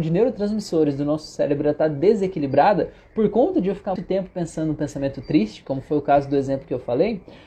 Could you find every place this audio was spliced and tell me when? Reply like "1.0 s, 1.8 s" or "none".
4.0 s